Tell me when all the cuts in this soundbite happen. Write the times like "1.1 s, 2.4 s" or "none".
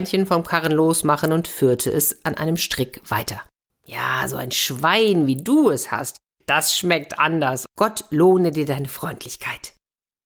3.7 s, 7.7 s